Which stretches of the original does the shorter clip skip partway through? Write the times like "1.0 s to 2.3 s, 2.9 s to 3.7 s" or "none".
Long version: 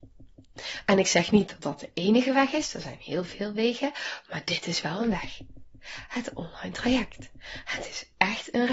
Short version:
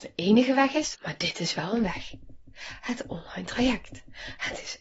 2.7 s to 4.2 s